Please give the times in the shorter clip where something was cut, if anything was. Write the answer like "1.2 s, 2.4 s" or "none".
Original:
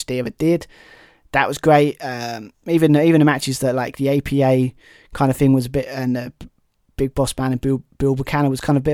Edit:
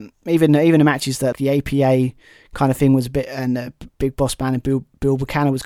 1.3 s, 3.9 s